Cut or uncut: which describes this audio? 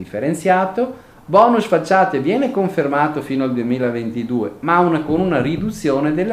uncut